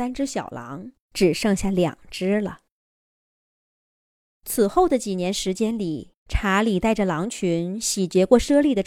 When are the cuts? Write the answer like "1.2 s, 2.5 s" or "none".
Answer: 1.0 s, 4.2 s, 6.2 s